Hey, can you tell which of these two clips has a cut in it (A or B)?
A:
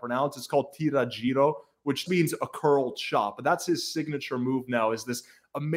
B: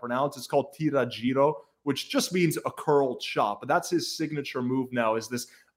A